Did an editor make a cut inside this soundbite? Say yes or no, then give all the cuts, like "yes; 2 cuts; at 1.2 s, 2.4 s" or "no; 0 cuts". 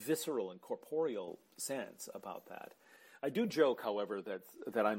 no; 0 cuts